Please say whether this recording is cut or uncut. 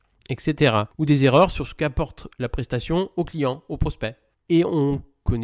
cut